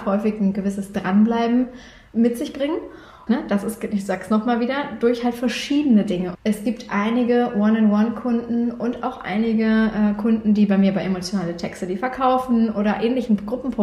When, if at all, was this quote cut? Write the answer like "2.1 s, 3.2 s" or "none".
3.3 s, 6.3 s